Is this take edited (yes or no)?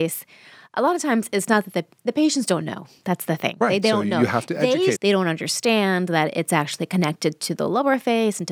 yes